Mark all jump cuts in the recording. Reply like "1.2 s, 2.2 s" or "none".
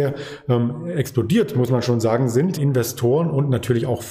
2.6 s